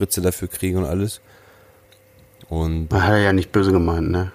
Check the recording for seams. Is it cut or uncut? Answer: cut